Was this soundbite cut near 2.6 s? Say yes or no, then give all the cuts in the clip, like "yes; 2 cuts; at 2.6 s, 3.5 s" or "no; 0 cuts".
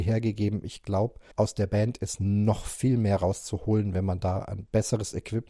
no; 1 cut; at 1.3 s